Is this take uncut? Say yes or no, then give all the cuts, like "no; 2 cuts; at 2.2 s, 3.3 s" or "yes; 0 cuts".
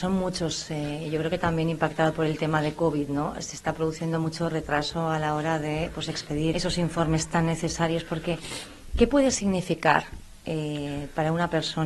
no; 1 cut; at 6.5 s